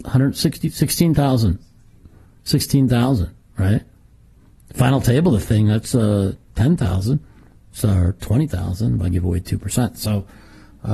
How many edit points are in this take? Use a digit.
0